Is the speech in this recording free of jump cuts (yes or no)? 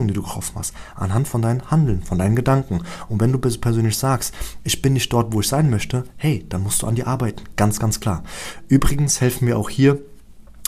yes